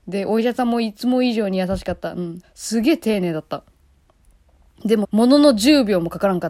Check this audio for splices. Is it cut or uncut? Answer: cut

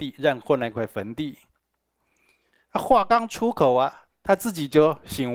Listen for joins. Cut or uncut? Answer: uncut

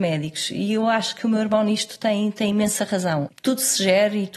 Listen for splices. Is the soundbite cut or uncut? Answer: cut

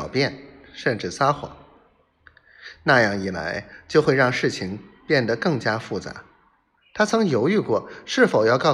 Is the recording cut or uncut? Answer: cut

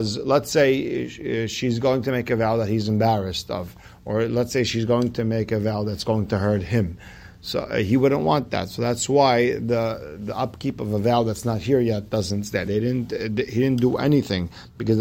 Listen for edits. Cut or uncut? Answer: cut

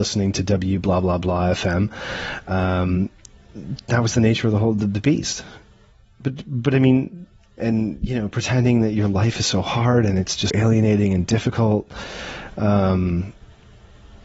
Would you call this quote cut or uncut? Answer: cut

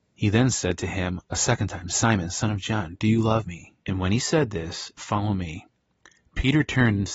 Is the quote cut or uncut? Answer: cut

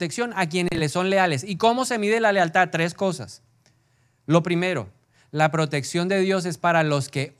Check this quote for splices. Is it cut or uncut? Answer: uncut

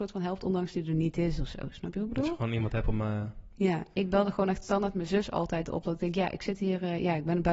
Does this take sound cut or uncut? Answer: uncut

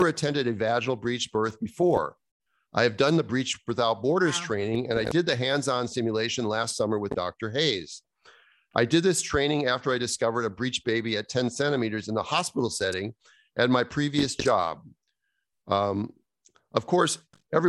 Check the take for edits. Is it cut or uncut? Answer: uncut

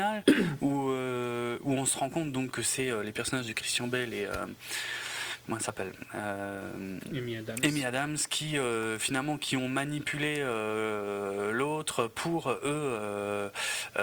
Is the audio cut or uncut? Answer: uncut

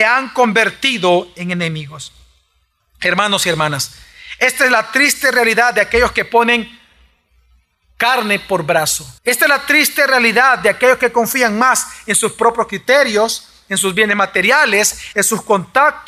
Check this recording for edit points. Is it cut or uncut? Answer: cut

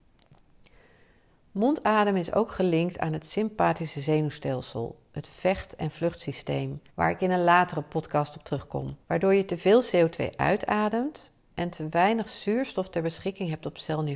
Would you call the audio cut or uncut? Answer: cut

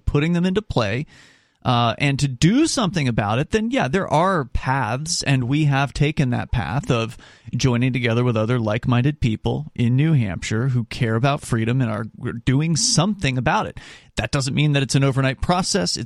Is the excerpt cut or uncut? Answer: uncut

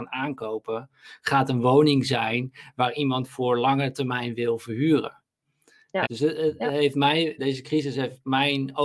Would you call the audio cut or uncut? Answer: cut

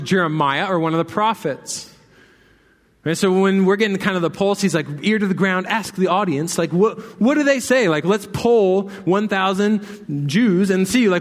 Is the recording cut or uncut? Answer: uncut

